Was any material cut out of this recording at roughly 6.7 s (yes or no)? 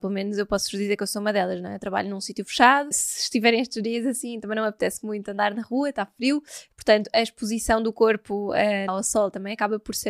no